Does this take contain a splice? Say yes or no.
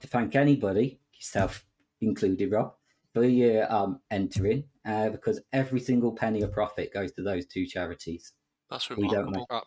no